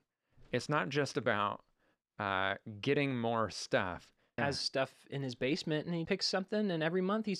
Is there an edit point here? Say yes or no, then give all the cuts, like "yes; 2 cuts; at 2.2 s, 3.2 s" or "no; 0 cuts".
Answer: yes; 2 cuts; at 4.4 s, 6.1 s